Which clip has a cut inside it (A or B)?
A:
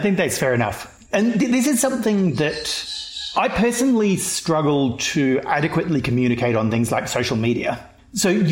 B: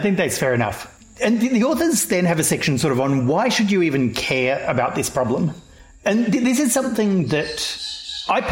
A